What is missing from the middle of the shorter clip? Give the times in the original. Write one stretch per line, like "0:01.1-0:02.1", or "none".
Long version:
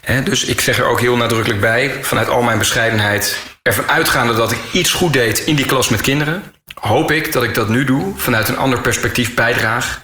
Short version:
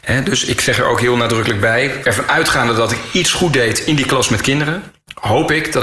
0:02.0-0:03.6